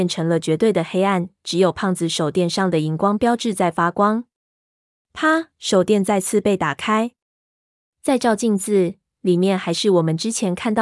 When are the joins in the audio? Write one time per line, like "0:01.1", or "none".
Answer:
none